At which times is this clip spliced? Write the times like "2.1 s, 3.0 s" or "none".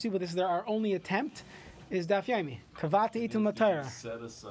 2.7 s